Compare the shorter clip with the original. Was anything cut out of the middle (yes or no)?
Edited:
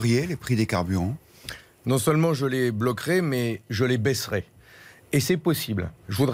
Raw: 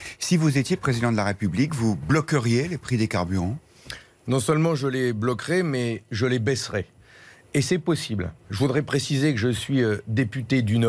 no